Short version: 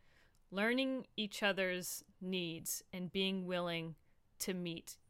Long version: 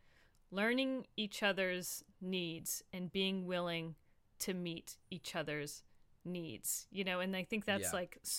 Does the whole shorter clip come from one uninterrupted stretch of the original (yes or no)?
yes